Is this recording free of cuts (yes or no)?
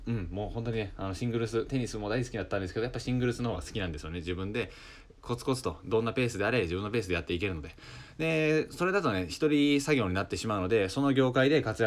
yes